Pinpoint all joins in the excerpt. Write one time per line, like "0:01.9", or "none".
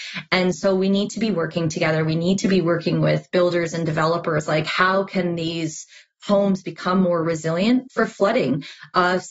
none